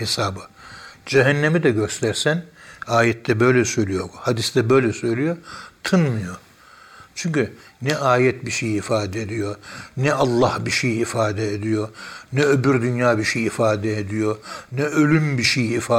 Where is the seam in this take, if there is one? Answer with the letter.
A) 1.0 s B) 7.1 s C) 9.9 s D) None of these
D